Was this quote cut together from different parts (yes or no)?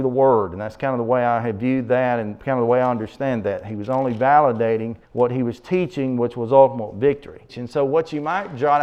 yes